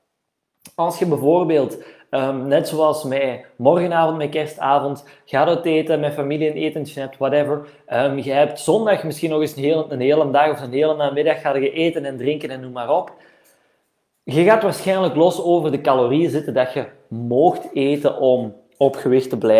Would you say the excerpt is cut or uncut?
uncut